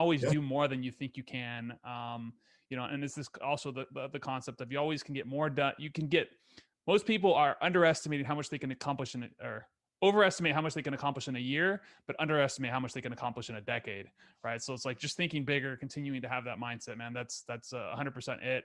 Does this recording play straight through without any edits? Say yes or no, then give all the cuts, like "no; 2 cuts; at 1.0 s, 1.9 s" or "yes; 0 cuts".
yes; 0 cuts